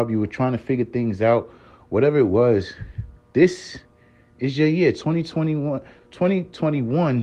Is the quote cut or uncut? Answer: uncut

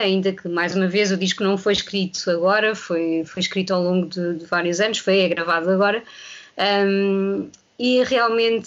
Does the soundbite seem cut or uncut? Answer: uncut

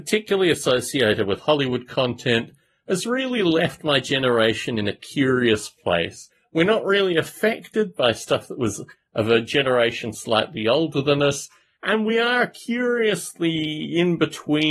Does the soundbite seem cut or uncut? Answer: uncut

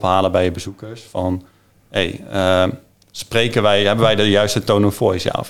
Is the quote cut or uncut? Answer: uncut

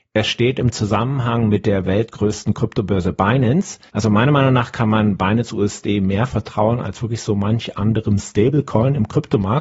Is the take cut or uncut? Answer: cut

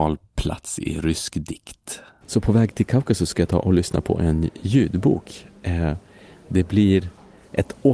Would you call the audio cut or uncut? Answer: cut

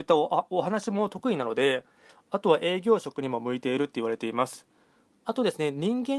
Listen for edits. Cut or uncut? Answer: uncut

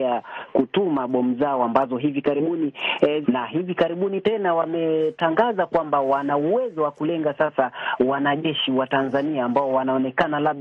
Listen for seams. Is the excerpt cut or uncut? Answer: cut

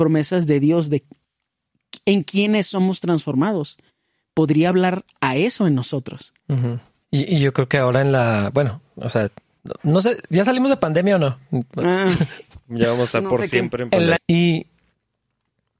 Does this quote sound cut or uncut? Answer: cut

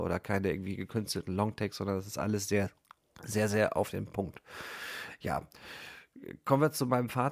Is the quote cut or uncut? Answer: uncut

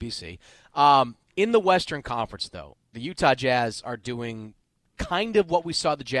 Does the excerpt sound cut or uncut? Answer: uncut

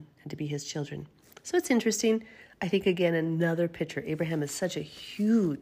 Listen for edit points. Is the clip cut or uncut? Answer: uncut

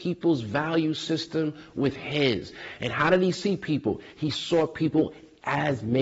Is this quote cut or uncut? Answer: uncut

